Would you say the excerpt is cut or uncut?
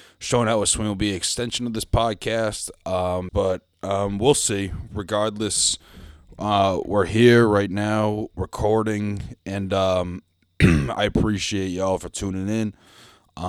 cut